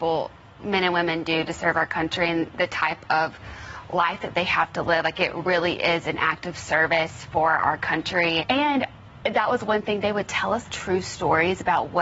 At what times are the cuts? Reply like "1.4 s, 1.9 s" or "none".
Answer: 8.4 s, 10.7 s

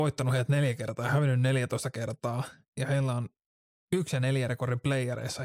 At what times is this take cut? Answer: none

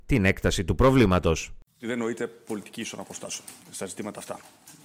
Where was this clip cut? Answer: 3.6 s

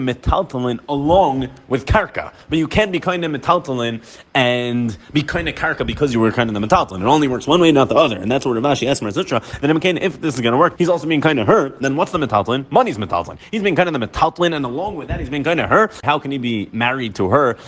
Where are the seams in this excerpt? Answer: 10.8 s, 16.0 s

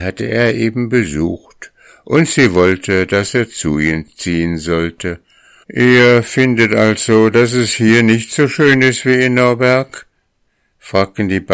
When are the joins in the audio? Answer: 5.6 s

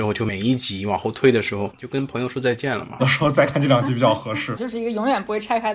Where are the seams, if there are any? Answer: 1.7 s, 3.0 s, 4.6 s

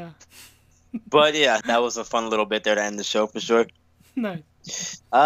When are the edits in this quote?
1.6 s

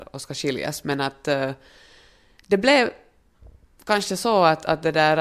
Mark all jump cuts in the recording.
none

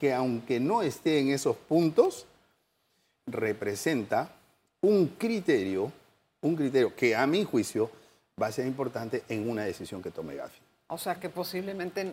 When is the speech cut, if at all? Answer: none

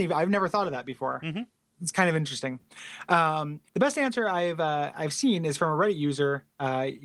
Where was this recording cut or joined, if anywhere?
3.7 s

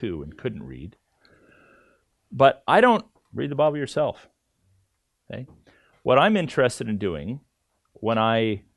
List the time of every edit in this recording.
3.2 s

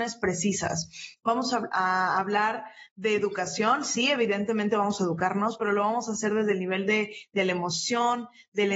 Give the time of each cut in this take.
none

